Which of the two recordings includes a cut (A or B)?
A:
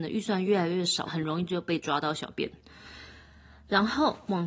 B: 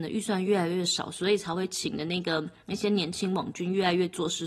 A